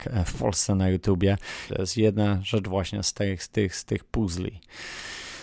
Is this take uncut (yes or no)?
no